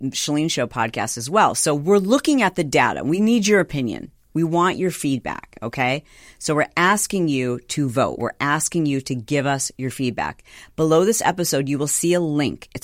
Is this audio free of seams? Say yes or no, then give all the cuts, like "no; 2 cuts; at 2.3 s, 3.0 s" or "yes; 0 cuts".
yes; 0 cuts